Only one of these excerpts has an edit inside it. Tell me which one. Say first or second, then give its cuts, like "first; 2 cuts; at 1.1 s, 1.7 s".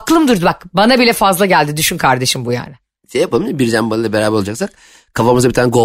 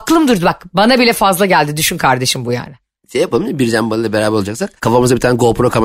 second; 1 cut; at 4.8 s